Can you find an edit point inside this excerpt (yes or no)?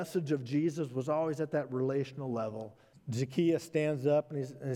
yes